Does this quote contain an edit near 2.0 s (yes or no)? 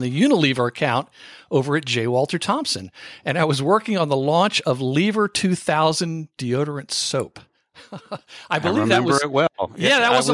no